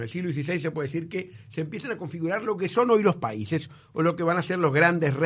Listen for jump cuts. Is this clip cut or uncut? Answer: uncut